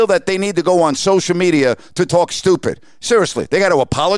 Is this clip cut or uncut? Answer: uncut